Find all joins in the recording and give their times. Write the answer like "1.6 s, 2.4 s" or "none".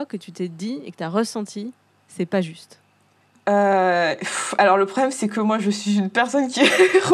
none